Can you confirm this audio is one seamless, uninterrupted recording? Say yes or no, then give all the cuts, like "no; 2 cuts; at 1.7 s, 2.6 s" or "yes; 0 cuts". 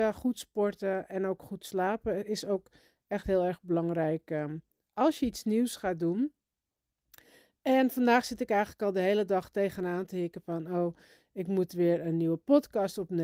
yes; 0 cuts